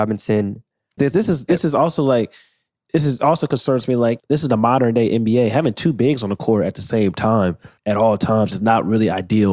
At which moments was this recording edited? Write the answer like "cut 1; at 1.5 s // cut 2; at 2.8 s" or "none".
cut 1; at 1.0 s // cut 2; at 4.2 s // cut 3; at 7.8 s